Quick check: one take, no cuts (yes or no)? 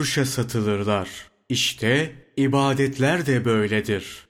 yes